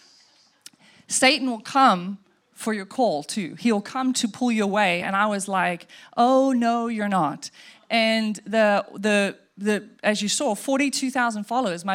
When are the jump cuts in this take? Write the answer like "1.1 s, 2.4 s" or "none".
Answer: none